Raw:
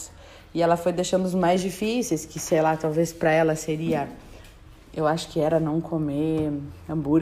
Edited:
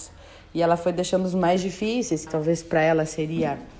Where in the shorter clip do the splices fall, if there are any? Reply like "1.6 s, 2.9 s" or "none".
2.3 s